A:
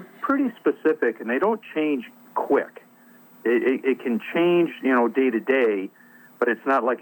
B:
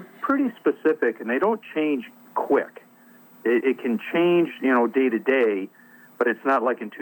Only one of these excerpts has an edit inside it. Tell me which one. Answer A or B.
B